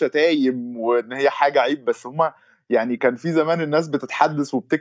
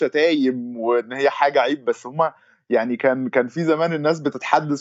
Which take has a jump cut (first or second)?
first